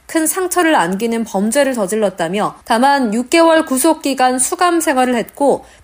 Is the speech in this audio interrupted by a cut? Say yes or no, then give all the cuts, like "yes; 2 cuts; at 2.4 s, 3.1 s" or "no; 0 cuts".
yes; 1 cut; at 2.6 s